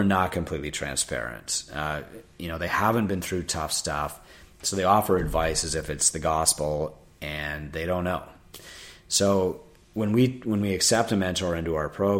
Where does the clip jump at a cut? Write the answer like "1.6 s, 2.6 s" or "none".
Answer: none